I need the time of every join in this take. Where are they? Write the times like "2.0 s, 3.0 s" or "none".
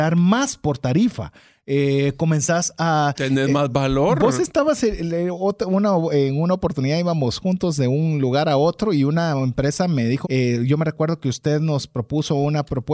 10.2 s